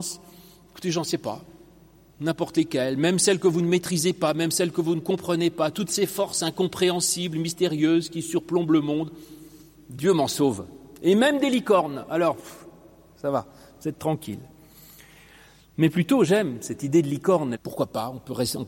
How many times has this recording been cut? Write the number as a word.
one